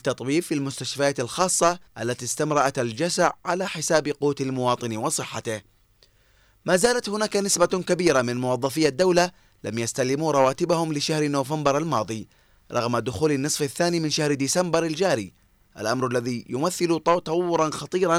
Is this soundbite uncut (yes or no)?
no